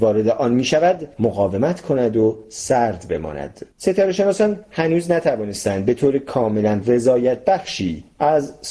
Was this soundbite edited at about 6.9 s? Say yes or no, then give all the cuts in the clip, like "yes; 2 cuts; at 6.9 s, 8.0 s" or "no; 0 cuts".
no; 1 cut; at 3.7 s